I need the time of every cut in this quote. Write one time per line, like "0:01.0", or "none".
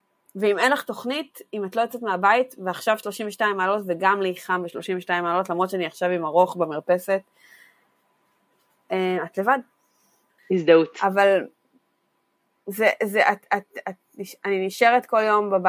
0:10.4